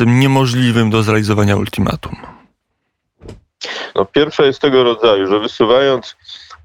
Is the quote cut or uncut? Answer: cut